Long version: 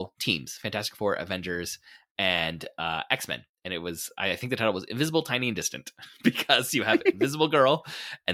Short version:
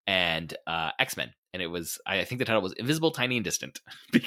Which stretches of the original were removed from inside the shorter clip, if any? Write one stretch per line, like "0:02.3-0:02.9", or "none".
none